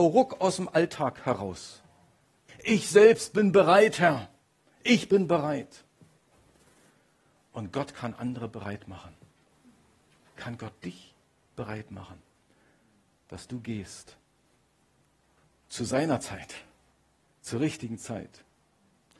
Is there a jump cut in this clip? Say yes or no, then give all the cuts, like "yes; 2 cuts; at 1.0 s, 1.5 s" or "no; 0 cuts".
yes; 1 cut; at 2.5 s